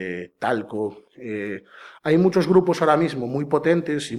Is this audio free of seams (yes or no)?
yes